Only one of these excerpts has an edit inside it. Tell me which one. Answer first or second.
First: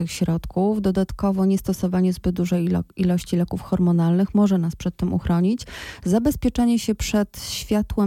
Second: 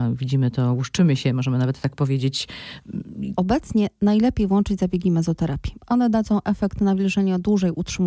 second